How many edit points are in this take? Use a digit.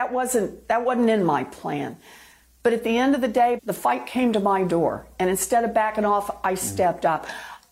1